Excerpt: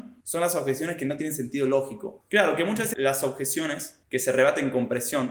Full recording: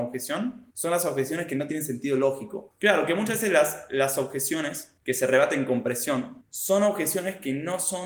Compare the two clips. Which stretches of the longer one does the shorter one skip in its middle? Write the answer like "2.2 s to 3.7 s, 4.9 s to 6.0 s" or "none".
3.4 s to 3.9 s